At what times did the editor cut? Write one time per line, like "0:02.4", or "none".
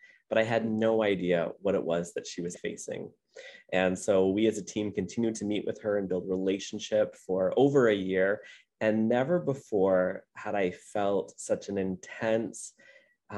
0:02.5
0:08.6